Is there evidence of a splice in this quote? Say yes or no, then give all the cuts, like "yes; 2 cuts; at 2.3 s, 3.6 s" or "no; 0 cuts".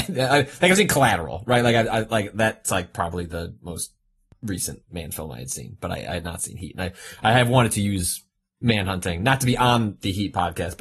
no; 0 cuts